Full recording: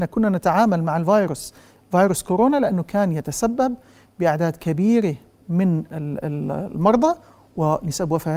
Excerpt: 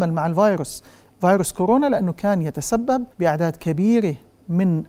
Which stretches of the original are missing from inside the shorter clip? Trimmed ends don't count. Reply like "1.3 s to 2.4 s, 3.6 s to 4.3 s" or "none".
3.8 s to 4.1 s